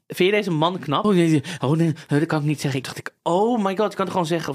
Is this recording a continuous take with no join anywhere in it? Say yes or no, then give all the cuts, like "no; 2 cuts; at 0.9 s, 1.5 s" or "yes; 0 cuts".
no; 2 cuts; at 1.0 s, 2.8 s